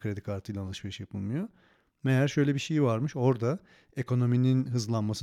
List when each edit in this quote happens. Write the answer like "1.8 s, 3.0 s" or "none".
none